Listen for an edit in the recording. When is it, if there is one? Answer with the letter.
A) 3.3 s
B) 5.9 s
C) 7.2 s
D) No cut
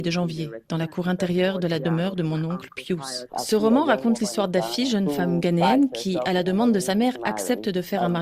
A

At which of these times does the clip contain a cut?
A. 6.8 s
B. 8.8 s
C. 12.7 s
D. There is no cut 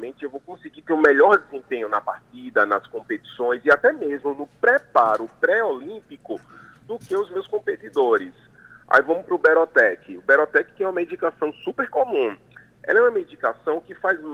D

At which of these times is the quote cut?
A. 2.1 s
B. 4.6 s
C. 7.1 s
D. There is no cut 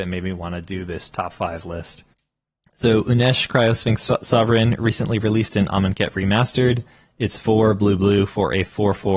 A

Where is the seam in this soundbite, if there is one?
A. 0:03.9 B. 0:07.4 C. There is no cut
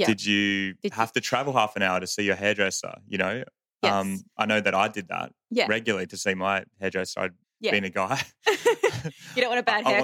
B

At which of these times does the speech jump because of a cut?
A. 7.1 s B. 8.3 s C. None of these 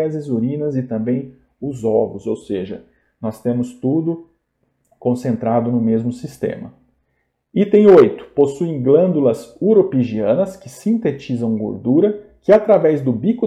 C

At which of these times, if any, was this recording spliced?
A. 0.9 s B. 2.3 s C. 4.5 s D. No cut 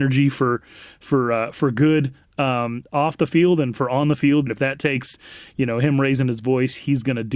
C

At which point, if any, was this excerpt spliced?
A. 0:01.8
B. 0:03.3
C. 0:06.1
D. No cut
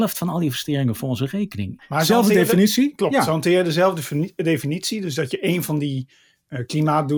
A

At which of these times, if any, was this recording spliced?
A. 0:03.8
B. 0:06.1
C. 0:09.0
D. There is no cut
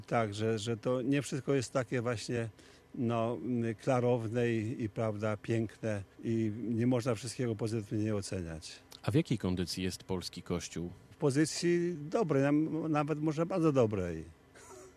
B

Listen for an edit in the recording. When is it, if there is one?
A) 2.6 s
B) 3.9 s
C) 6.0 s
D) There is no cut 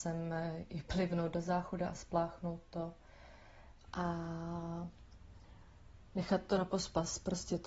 B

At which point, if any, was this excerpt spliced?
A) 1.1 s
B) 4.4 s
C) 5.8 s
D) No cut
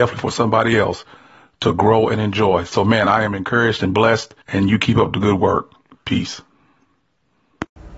B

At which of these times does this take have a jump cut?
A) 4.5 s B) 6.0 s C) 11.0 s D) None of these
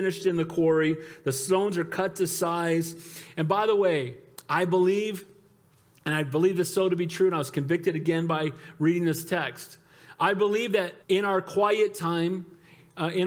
C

